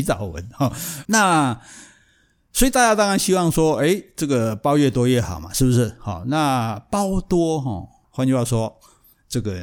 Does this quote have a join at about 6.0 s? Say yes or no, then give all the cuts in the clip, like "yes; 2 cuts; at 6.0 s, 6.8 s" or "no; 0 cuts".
no; 2 cuts; at 1.1 s, 8.0 s